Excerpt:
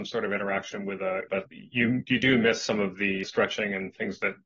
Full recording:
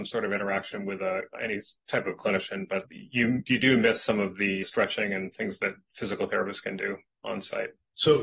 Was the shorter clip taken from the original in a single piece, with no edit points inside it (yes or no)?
no